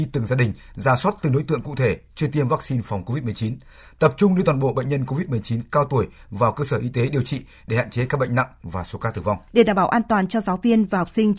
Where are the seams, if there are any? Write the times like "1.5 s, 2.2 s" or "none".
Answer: 9.5 s

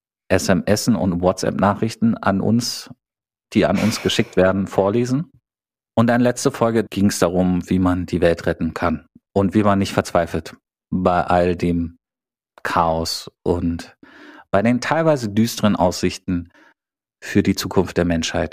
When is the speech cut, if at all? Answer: 6.9 s

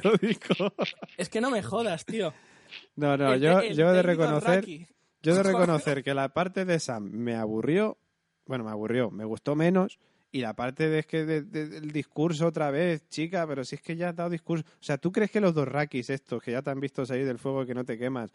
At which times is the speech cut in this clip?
none

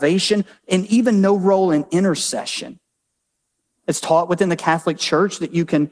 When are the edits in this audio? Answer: none

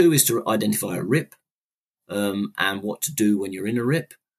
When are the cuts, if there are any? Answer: none

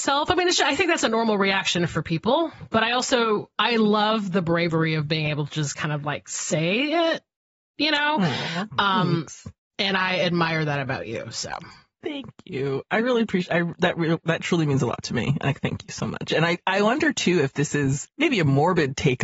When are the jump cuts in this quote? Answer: none

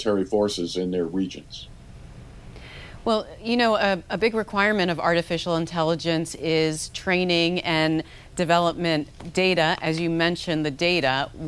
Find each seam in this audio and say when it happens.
none

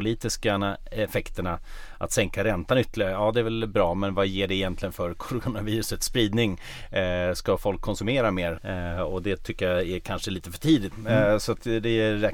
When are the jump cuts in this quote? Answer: 8.6 s, 10.9 s

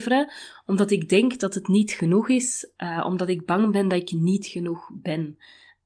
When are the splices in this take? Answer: none

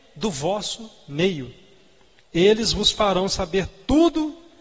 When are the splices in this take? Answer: none

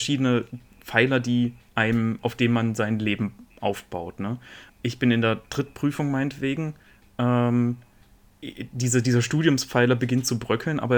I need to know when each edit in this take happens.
4.7 s

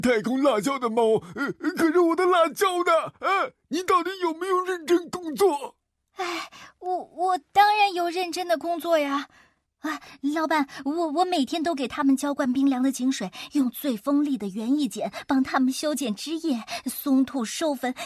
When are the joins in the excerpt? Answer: 9.6 s

